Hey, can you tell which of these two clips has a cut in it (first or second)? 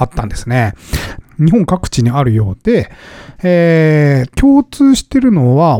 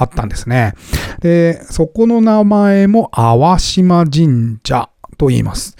first